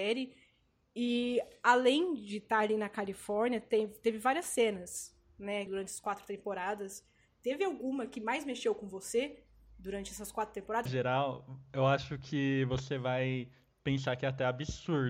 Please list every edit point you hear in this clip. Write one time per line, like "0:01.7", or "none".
0:05.7
0:10.9